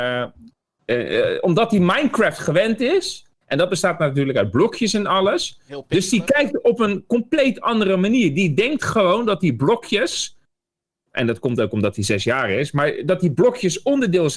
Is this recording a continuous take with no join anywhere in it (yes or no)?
yes